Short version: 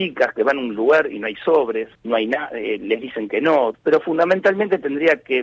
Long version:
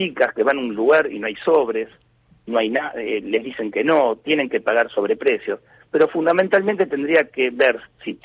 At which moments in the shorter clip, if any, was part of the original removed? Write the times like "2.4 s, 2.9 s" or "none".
1.9 s, 3.7 s